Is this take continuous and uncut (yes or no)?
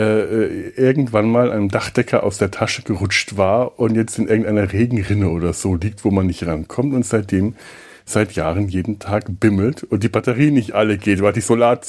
yes